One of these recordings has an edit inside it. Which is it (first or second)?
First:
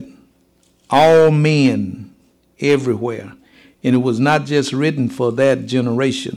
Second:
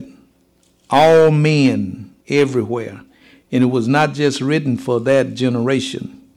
second